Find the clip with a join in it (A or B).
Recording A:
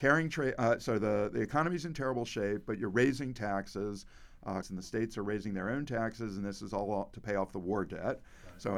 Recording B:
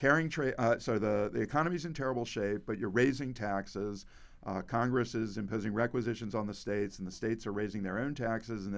A